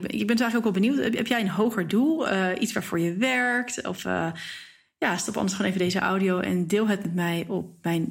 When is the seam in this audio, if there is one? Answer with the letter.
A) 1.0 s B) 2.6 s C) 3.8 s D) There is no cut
D